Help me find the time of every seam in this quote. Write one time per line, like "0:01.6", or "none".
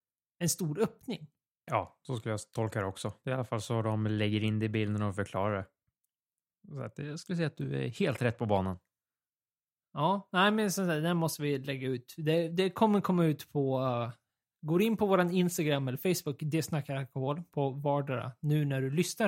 0:01.7

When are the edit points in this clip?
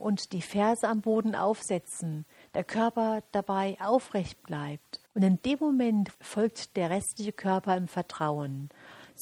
0:05.1
0:06.1

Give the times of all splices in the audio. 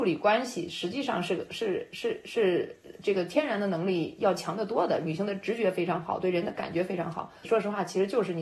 0:07.4

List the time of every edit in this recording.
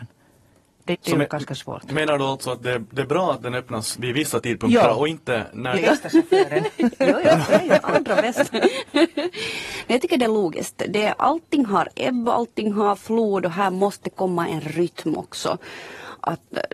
0:00.9
0:05.8

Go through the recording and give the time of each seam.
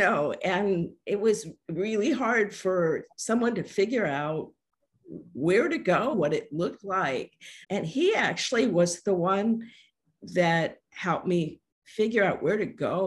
0:06.1
0:07.6

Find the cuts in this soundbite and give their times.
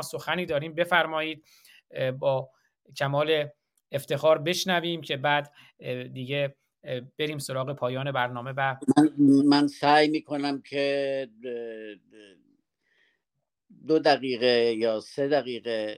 0:09.4

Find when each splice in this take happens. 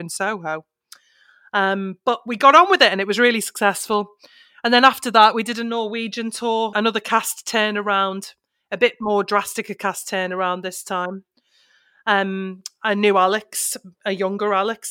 0:06.7

